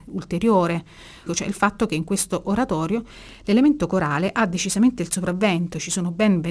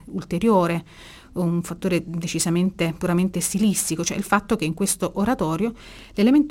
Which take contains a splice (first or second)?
first